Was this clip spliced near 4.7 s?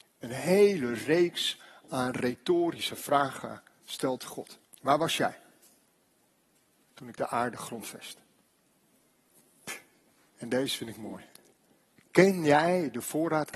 yes; 1 cut; at 4.7 s

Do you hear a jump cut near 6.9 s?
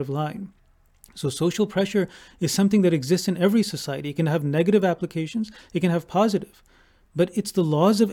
no; 0 cuts

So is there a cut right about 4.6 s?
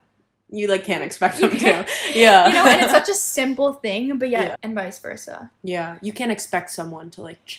yes; 1 cut; at 4.6 s

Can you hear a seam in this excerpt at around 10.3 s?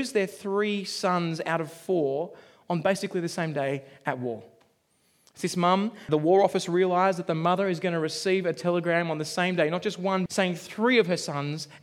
yes; 2 cuts; at 6.1 s, 10.3 s

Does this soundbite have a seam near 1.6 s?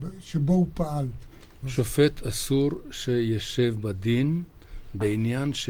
yes; 1 cut; at 1.6 s

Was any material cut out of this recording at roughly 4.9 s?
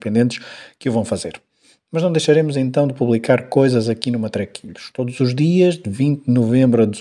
no; 0 cuts

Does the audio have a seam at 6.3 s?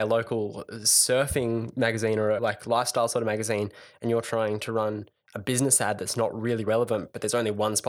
no; 1 cut; at 2.4 s

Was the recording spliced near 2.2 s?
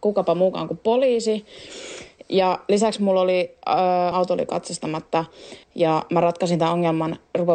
no; 2 cuts; at 4.1 s, 5.6 s

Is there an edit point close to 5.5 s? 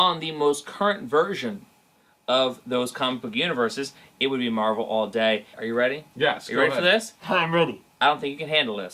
yes; 1 cut; at 5.5 s

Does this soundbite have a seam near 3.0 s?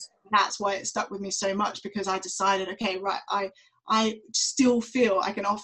no; 0 cuts

